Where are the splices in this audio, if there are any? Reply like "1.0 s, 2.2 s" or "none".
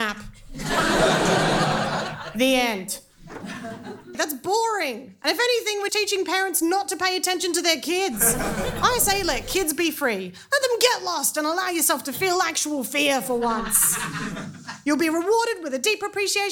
4.1 s, 5.9 s